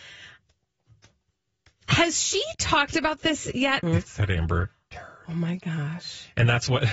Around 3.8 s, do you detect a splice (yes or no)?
yes